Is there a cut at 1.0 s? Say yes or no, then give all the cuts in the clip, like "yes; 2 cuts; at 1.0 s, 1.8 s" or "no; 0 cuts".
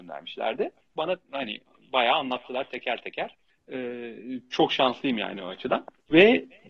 yes; 2 cuts; at 1.0 s, 4.5 s